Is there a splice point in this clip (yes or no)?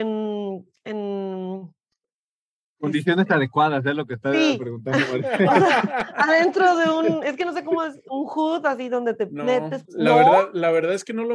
yes